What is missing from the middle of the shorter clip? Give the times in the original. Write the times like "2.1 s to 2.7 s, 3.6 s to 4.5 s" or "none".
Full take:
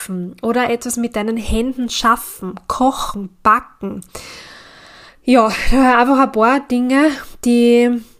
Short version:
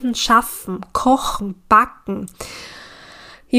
none